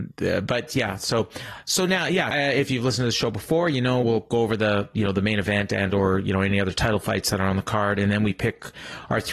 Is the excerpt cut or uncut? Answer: cut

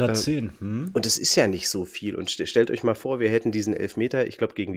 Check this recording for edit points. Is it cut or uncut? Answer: uncut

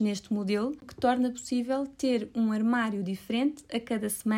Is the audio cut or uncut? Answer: uncut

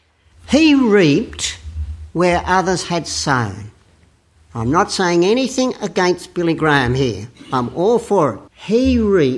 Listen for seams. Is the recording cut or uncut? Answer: cut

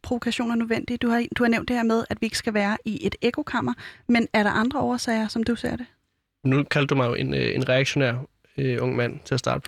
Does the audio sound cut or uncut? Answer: uncut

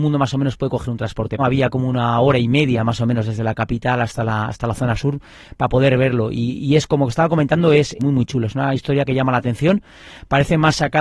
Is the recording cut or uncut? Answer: cut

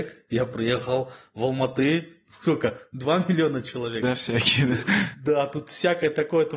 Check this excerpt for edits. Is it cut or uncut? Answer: cut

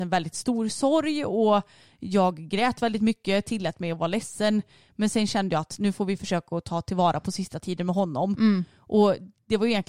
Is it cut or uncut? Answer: uncut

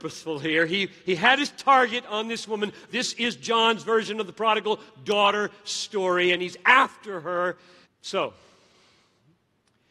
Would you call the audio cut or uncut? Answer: cut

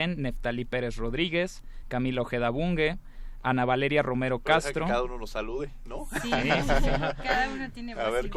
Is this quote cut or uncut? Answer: uncut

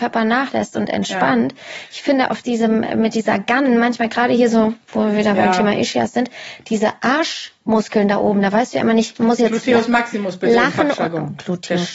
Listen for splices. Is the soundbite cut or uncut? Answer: uncut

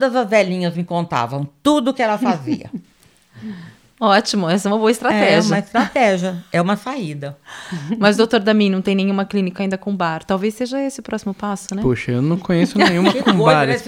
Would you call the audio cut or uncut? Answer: uncut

